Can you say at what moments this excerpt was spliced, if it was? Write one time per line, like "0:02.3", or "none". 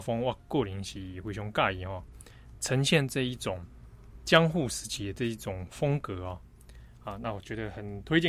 none